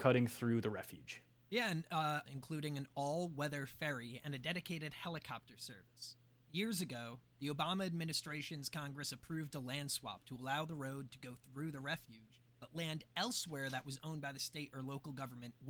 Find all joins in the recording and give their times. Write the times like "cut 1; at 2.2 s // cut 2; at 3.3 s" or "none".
cut 1; at 2.3 s